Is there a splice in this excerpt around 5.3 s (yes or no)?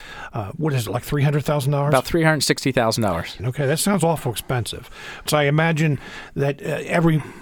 yes